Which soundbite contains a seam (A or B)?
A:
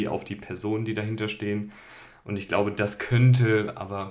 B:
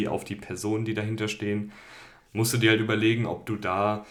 B